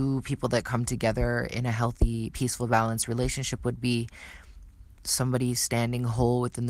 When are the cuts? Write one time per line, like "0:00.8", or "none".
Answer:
none